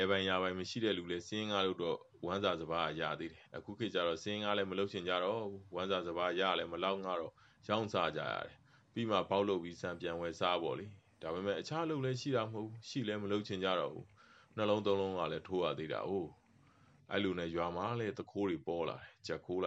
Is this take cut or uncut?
uncut